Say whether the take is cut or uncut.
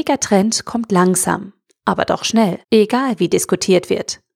cut